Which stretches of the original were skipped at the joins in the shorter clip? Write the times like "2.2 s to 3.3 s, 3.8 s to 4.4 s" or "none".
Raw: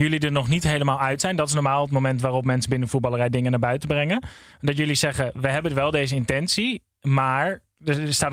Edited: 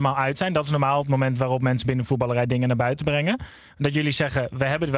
none